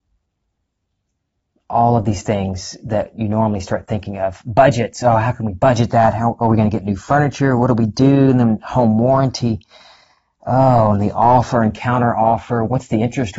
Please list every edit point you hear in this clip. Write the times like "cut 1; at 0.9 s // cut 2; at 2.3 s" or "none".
none